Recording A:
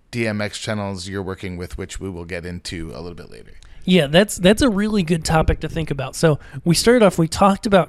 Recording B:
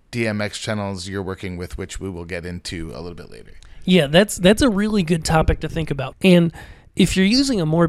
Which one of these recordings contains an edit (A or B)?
B